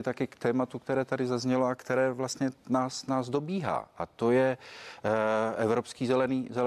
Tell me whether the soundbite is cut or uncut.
uncut